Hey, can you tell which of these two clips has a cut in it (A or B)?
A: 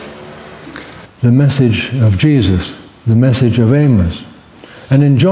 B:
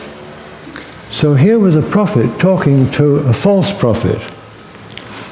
A